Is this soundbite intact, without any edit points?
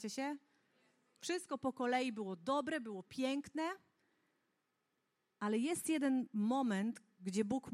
yes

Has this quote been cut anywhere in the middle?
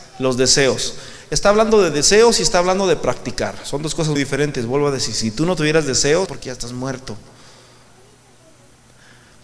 yes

